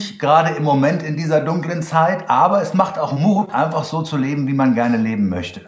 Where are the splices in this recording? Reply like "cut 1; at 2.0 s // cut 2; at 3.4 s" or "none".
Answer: none